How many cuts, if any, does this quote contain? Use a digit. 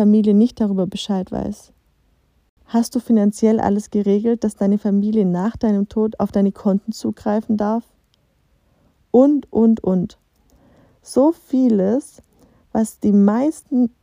1